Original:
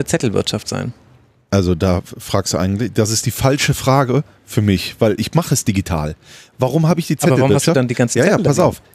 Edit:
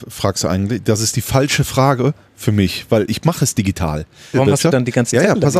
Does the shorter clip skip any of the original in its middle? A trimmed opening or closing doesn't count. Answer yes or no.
yes